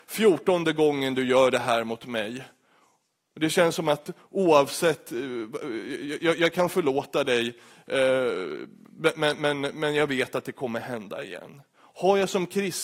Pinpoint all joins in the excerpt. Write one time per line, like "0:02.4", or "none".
none